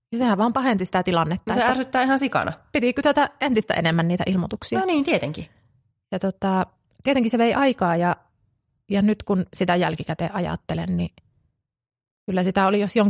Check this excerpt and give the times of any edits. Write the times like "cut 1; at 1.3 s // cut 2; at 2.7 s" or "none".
none